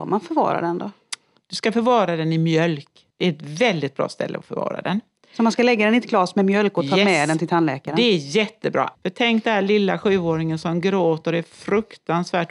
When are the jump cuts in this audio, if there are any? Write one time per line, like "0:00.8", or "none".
0:03.1
0:08.9